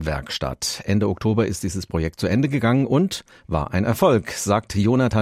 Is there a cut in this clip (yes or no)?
no